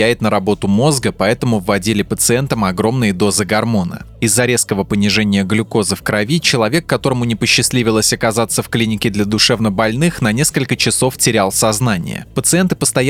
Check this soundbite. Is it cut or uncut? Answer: uncut